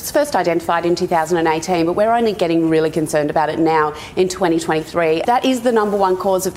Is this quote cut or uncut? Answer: cut